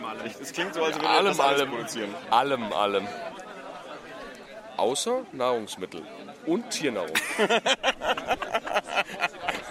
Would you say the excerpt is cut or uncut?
uncut